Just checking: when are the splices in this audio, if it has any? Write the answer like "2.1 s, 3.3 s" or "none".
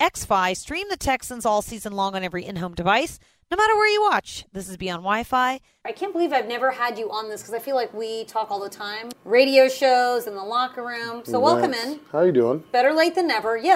5.8 s, 9.1 s